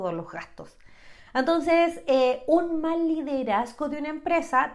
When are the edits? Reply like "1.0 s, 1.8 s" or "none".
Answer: none